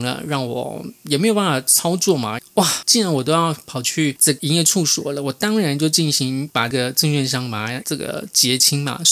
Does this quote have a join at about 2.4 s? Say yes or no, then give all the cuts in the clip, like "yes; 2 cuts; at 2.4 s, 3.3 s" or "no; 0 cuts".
yes; 1 cut; at 2.4 s